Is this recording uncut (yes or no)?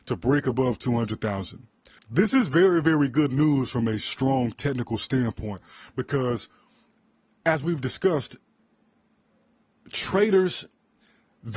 no